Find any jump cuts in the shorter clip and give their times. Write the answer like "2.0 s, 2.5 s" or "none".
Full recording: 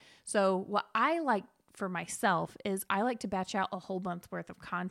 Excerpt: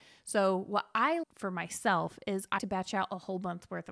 1.2 s, 2.6 s